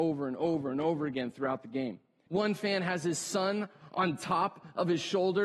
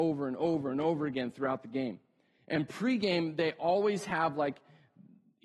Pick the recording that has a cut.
first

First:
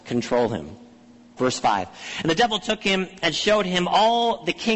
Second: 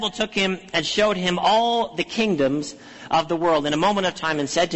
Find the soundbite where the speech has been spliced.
first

